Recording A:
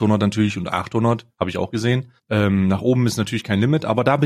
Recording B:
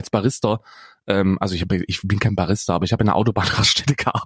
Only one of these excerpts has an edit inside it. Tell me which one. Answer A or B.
A